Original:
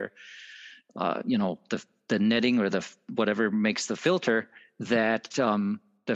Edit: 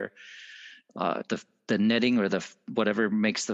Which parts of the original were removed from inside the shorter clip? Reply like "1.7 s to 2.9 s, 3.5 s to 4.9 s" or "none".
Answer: 1.2 s to 1.6 s